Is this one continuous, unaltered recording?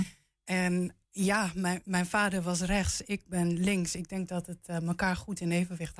no; 1 cut; at 1.0 s

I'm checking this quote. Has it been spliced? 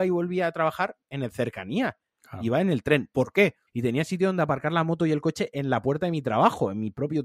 yes; 1 cut; at 3.7 s

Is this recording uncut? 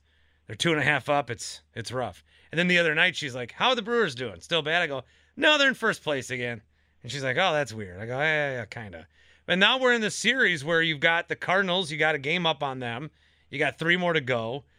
yes; 0 cuts

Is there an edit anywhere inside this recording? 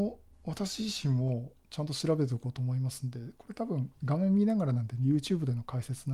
no; 0 cuts

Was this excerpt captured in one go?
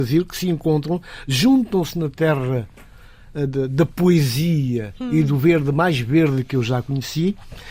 yes; 0 cuts

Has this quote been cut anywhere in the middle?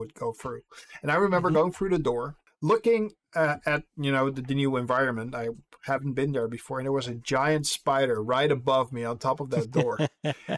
no; 0 cuts

